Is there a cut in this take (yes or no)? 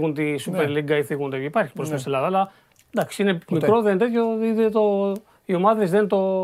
no